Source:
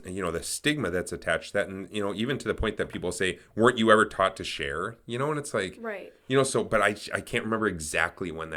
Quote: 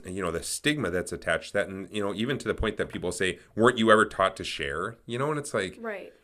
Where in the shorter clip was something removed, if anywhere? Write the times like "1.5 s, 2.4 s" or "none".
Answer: none